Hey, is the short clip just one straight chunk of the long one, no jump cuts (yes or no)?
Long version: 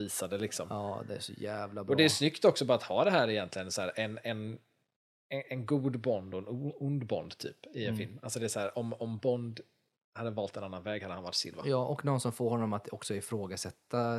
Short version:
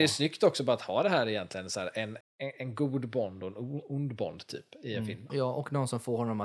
no